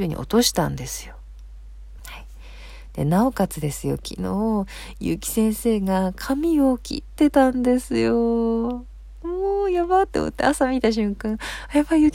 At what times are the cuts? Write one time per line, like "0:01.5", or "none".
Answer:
0:02.0